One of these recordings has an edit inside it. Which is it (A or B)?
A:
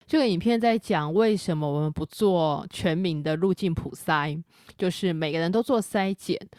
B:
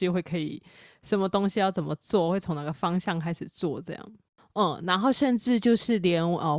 B